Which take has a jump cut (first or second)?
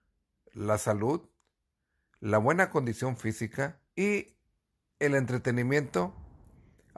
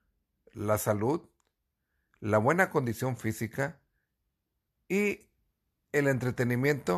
first